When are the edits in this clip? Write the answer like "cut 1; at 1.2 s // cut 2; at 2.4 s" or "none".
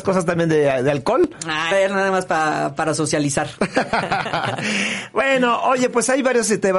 cut 1; at 1.7 s